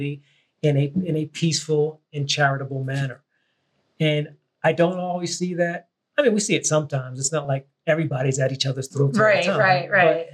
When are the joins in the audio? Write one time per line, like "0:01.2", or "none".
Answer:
none

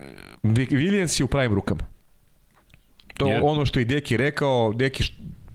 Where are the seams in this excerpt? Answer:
0:03.4

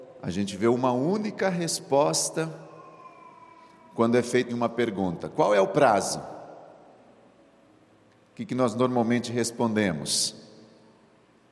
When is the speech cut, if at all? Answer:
0:04.5

